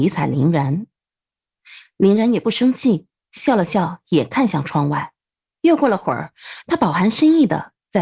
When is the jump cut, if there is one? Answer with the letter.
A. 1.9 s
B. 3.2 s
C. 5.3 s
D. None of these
D